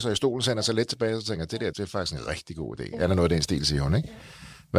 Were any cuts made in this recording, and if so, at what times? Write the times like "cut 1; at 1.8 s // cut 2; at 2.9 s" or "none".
cut 1; at 1.7 s